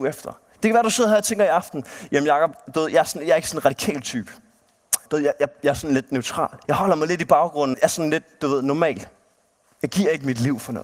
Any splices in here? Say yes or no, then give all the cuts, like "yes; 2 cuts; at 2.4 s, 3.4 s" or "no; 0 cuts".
yes; 3 cuts; at 5.1 s, 6.6 s, 7.7 s